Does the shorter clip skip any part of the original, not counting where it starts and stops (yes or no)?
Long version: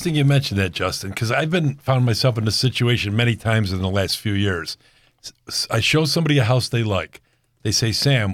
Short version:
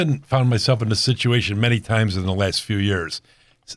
no